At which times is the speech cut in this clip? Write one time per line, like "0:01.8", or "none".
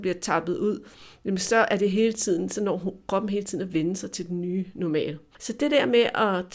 0:05.4